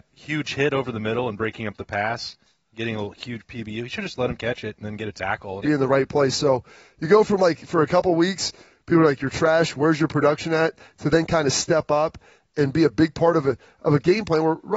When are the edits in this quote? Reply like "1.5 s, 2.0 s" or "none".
5.6 s